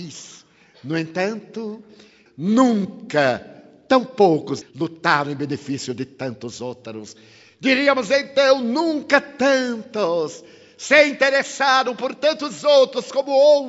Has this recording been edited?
yes; 2 cuts; at 2.3 s, 4.6 s

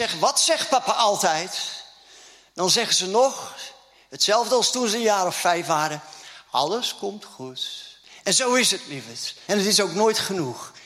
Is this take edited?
yes; 1 cut; at 9.5 s

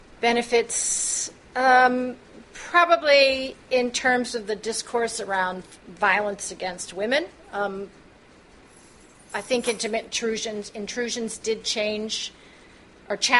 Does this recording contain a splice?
no; 0 cuts

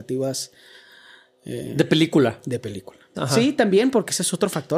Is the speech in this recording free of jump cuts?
no; 1 cut; at 3.1 s

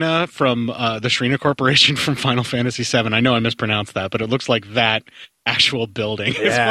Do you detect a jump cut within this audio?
no; 0 cuts

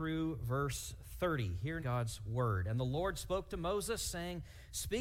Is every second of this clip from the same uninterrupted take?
no; 1 cut; at 1.8 s

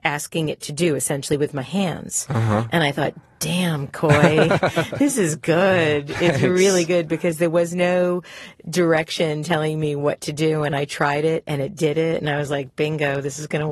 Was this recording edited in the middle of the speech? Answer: no; 0 cuts

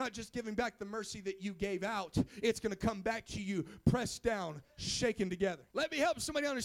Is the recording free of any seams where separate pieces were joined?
no; 1 cut; at 5.7 s

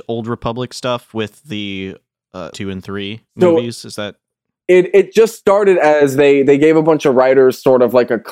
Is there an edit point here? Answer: yes; 1 cut; at 2.5 s

